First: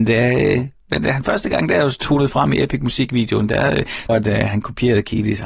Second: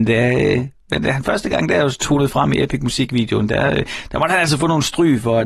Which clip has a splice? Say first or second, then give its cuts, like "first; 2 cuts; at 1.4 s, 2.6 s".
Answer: first; 1 cut; at 4.1 s